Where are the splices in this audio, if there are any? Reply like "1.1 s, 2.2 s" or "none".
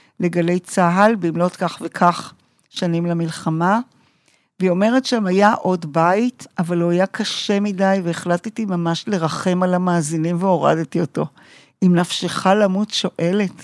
none